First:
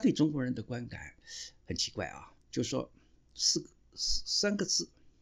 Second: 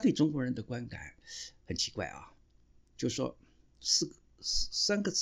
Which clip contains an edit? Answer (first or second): first